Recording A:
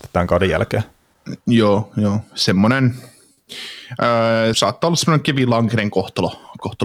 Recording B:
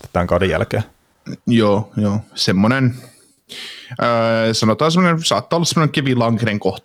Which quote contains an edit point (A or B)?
A